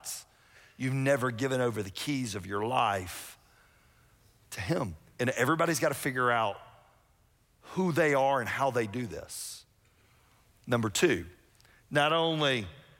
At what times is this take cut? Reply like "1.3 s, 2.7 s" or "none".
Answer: none